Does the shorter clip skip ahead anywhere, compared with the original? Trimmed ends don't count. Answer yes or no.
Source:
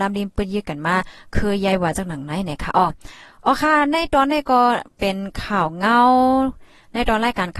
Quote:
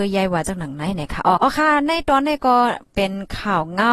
yes